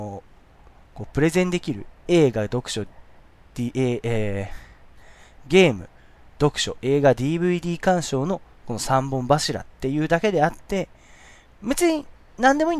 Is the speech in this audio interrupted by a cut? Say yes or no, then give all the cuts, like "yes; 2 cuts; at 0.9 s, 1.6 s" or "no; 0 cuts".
yes; 1 cut; at 1.9 s